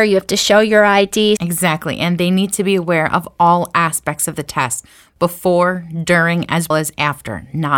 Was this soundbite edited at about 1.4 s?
yes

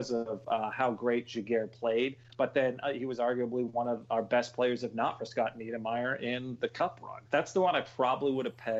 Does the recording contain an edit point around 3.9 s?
no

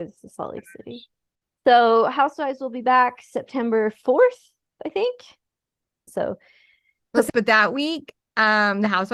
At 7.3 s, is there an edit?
yes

